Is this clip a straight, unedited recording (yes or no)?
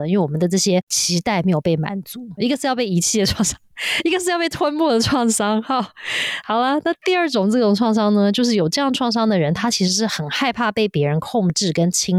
no